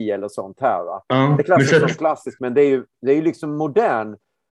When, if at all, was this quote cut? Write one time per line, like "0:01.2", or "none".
0:02.4